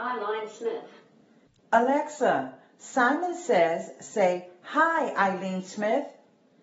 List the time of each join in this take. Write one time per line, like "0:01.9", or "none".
0:01.6